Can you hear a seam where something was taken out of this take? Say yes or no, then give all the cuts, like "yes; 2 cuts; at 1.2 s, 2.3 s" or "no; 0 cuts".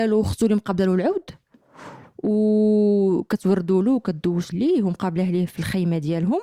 yes; 1 cut; at 4.5 s